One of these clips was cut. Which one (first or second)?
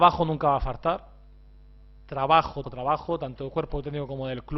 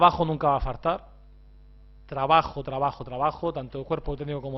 first